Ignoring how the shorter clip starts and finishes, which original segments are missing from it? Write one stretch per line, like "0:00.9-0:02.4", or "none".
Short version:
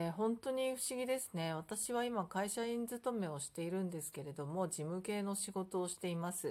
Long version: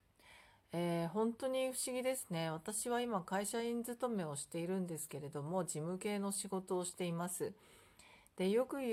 none

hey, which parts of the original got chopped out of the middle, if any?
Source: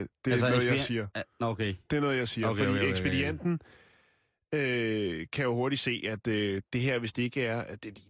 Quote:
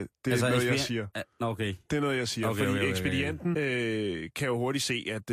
0:03.5-0:04.5

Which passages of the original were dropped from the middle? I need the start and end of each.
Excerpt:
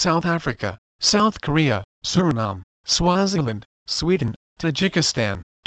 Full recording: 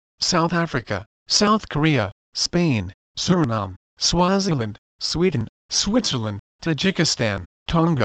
0:02.2-0:03.0
0:05.6-0:06.5

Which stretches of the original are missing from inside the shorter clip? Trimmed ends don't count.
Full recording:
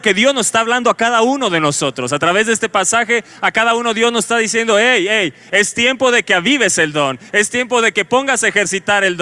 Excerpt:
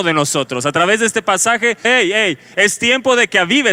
0:03.3-0:04.8

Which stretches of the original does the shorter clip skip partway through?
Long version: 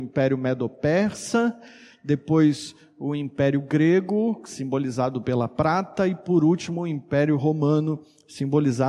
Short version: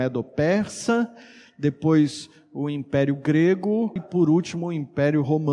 0:04.4-0:06.1

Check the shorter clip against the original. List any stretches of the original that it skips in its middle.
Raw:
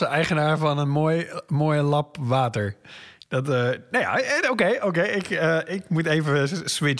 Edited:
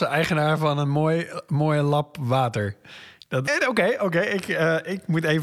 0:03.5-0:04.3

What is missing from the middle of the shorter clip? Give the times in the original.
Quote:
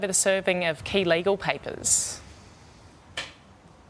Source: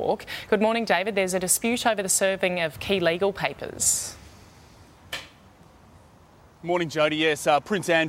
none

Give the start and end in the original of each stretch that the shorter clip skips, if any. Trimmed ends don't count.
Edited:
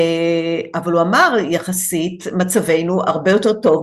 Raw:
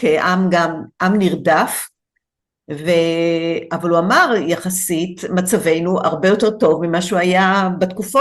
none

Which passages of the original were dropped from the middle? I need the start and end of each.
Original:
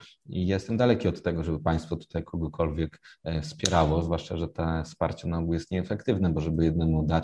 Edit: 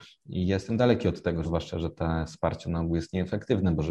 0:01.4-0:04.0

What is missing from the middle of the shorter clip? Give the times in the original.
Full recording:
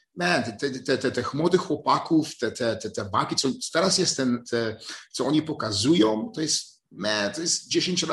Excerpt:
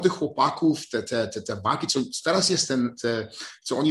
none

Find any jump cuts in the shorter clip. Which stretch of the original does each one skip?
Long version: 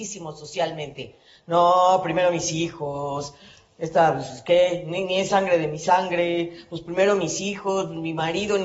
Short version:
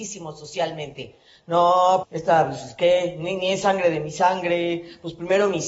0:02.0-0:03.7

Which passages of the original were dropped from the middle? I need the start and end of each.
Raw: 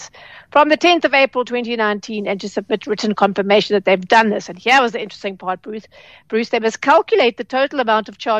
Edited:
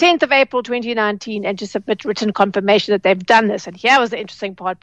none

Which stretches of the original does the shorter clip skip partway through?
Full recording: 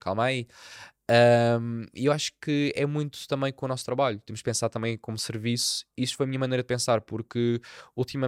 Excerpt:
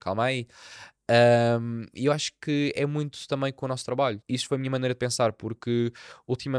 0:04.2-0:05.9

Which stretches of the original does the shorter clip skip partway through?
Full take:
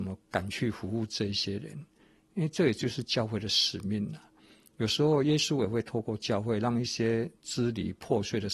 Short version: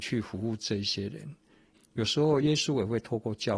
0:02.2-0:04.6

